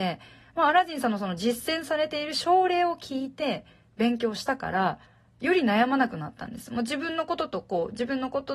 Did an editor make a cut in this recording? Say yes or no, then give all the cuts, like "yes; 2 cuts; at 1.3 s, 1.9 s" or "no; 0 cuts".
no; 0 cuts